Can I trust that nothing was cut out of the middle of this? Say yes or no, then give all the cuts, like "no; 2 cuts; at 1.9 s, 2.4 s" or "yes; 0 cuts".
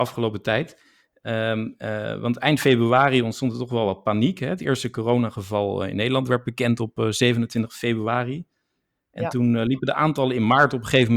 yes; 0 cuts